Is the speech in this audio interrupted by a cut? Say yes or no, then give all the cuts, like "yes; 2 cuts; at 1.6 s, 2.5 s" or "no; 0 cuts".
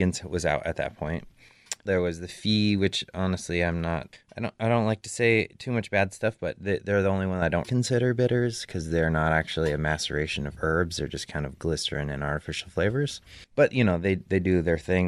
yes; 2 cuts; at 1.9 s, 7.6 s